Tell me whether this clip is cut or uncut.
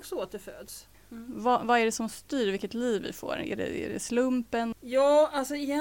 cut